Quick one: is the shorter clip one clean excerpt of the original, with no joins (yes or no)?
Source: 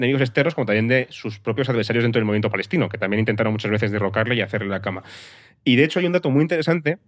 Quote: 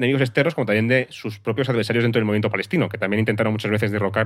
yes